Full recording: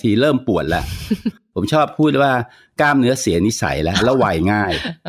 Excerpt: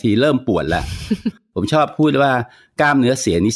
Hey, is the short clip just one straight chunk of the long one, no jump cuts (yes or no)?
yes